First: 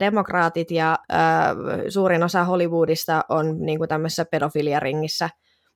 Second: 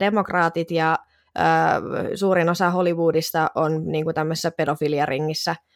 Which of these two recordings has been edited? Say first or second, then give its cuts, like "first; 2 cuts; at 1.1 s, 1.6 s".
first; 1 cut; at 1.0 s